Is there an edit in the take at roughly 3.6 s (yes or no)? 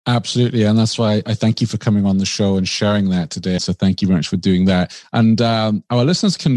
yes